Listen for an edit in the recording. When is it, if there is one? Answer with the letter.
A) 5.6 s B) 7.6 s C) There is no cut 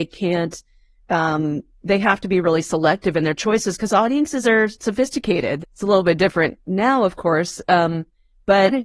A